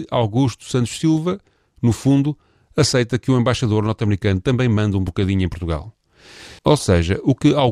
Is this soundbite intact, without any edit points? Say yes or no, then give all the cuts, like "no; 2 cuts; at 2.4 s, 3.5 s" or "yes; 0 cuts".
no; 1 cut; at 6.6 s